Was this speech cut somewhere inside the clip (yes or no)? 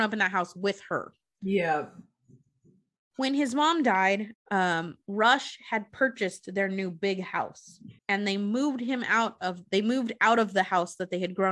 yes